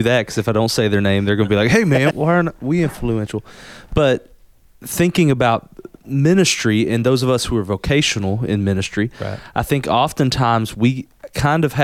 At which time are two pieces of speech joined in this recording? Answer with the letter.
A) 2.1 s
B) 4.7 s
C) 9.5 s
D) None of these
A